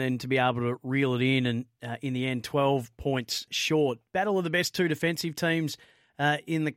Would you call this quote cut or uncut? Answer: cut